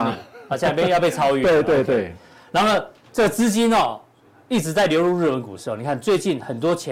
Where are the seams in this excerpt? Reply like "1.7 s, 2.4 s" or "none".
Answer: none